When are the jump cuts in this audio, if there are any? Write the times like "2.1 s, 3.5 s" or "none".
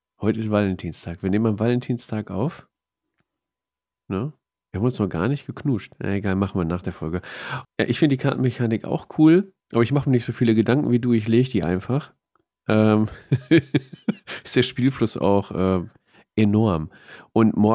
7.6 s